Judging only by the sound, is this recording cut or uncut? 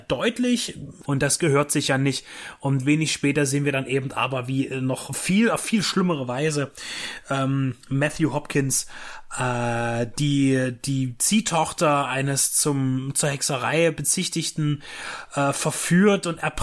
cut